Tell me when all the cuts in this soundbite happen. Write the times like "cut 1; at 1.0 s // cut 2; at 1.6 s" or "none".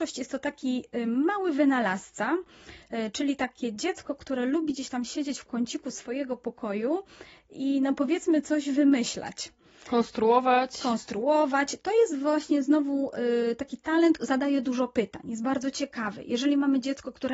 cut 1; at 14.2 s